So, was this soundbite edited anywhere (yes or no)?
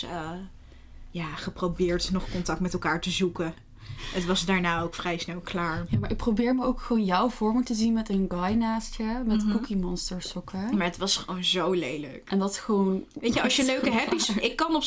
yes